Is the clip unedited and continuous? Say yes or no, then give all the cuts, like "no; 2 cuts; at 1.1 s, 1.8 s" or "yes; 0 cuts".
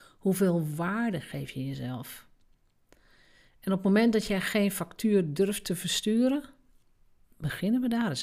yes; 0 cuts